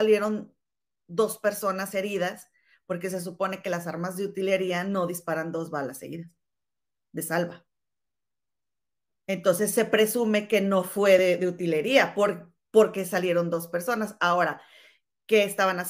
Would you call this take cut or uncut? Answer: uncut